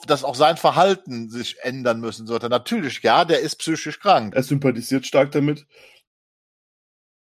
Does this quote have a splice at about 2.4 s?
no; 1 cut; at 4.3 s

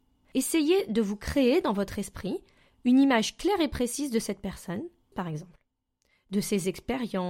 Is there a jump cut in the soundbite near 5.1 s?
yes; 1 cut; at 5.1 s

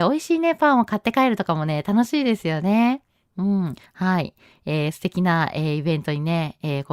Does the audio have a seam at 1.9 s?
no; 2 cuts; at 3.9 s, 4.9 s

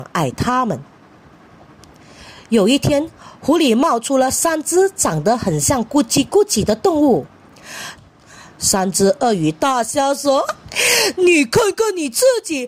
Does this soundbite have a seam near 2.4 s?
no; 2 cuts; at 8.0 s, 10.4 s

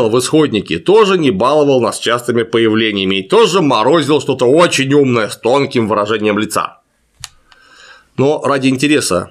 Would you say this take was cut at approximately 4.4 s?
no; 0 cuts

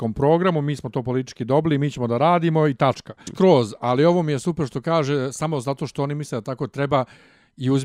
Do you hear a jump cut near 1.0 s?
no; 1 cut; at 3.3 s

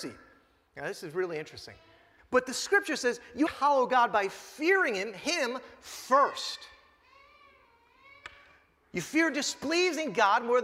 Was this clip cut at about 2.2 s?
yes; 2 cuts; at 2.2 s, 3.5 s

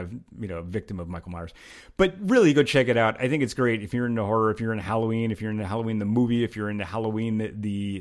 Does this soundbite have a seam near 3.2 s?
no; 0 cuts

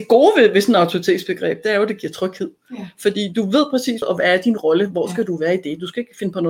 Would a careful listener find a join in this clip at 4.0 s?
yes; 1 cut; at 4.0 s

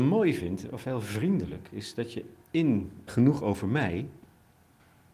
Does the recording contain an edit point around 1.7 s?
no; 1 cut; at 3.1 s

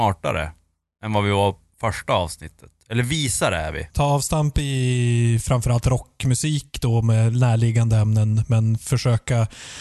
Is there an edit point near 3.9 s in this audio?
yes; 1 cut; at 3.9 s

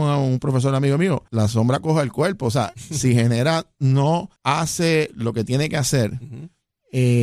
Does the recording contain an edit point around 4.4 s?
yes; 2 cuts; at 1.3 s, 4.4 s

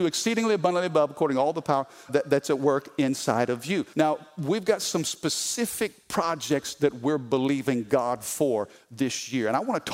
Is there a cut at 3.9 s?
yes; 2 cuts; at 2.1 s, 3.9 s

